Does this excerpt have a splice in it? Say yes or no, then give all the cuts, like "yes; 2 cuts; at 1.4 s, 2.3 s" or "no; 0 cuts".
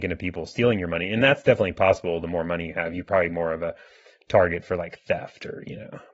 no; 0 cuts